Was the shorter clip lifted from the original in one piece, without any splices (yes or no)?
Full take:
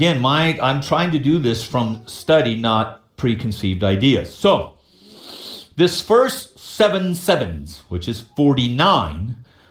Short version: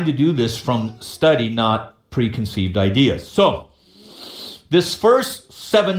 yes